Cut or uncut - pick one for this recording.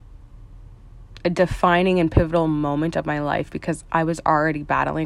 uncut